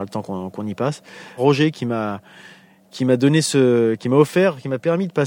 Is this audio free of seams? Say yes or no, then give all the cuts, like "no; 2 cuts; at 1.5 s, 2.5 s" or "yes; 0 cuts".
no; 1 cut; at 1.4 s